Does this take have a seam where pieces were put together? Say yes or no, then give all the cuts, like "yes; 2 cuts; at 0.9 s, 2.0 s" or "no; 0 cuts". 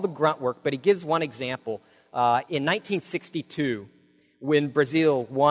yes; 1 cut; at 2.5 s